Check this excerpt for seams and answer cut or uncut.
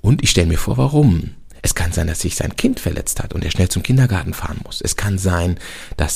uncut